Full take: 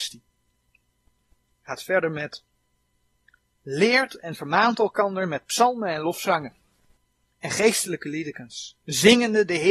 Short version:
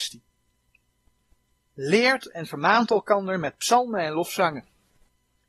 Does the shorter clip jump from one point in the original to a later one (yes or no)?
yes